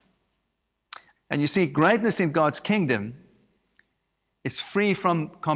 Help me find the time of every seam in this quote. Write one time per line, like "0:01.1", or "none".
0:01.1